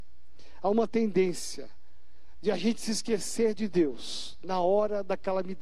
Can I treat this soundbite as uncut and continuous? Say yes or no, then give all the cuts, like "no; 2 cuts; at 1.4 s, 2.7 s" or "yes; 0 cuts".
yes; 0 cuts